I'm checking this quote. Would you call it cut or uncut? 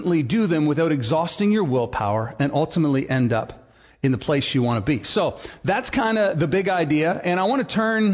uncut